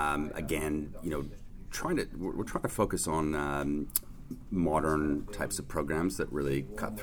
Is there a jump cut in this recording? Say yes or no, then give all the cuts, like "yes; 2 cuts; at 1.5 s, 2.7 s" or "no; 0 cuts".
no; 0 cuts